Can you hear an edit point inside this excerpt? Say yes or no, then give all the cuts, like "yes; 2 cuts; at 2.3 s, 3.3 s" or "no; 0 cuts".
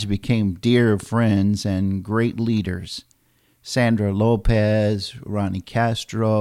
no; 0 cuts